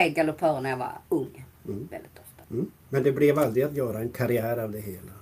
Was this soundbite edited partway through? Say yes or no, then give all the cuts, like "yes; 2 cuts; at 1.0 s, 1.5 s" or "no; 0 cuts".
yes; 1 cut; at 2.4 s